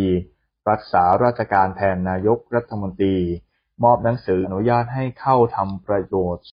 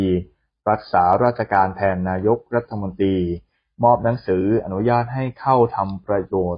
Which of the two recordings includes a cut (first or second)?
first